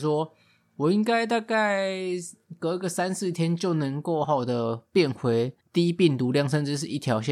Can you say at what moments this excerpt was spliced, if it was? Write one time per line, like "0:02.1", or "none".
0:04.2
0:05.6